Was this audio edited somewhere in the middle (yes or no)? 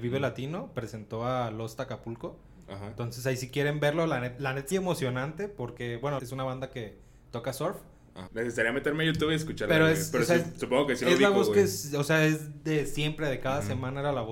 yes